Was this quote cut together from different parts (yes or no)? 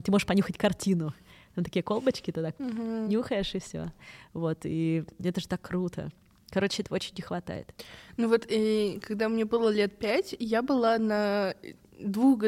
no